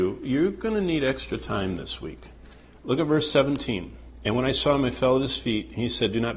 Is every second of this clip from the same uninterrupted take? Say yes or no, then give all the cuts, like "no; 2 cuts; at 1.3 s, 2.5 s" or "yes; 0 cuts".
yes; 0 cuts